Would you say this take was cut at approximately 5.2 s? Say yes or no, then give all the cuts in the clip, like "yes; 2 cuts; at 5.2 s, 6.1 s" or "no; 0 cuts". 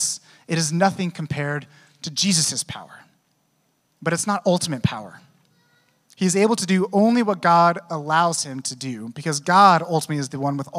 no; 1 cut; at 3.8 s